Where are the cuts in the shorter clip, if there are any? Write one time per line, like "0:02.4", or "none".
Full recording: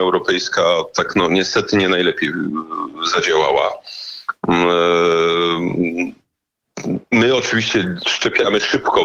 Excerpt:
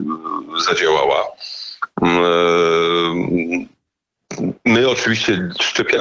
none